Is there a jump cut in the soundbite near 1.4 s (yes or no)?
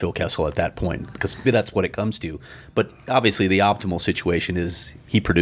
yes